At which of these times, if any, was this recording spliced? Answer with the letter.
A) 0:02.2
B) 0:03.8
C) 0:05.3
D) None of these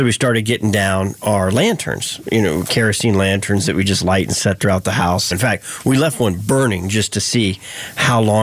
C